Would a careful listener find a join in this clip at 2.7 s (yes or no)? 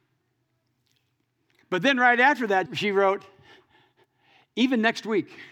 yes